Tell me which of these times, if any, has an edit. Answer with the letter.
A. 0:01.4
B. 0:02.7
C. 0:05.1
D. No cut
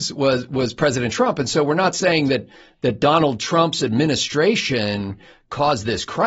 D